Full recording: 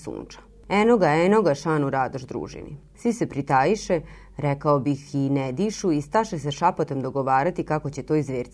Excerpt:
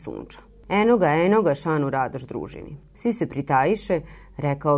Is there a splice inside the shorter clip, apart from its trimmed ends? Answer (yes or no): no